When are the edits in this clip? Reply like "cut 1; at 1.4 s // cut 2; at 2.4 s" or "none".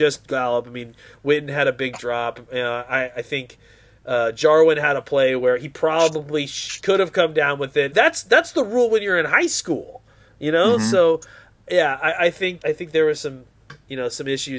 cut 1; at 7.9 s // cut 2; at 12.6 s